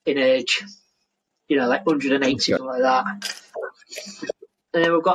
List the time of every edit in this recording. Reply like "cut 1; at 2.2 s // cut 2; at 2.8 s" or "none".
cut 1; at 2.6 s

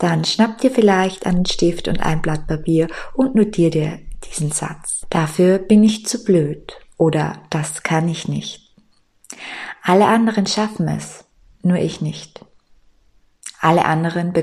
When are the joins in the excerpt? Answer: cut 1; at 5.0 s

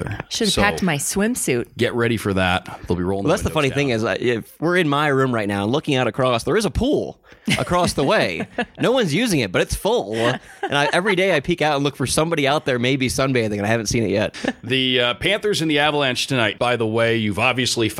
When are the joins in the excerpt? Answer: cut 1; at 14.3 s // cut 2; at 16.6 s

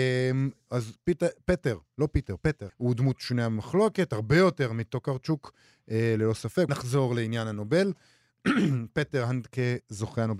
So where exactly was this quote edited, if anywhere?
cut 1; at 2.7 s // cut 2; at 6.7 s

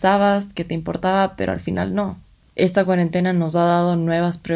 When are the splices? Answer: none

